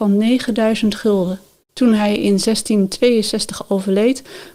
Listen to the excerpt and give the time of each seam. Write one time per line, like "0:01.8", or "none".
none